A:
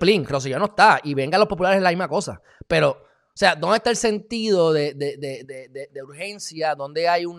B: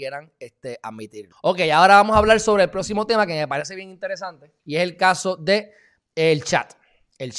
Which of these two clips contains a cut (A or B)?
B